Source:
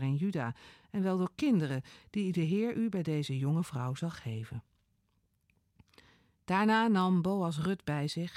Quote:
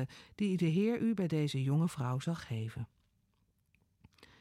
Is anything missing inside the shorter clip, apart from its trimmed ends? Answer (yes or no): no